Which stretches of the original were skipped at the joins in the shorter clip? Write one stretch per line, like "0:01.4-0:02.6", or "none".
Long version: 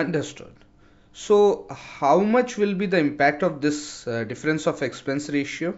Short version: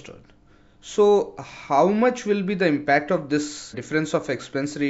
0:04.0-0:04.3